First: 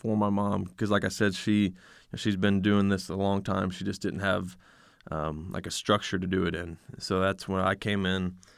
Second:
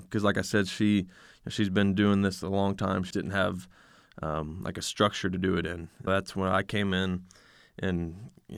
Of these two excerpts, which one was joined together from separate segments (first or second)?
second